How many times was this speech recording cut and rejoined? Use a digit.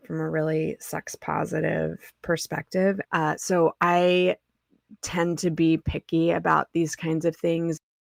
2